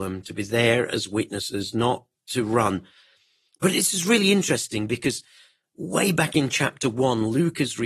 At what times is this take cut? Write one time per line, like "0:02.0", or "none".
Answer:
none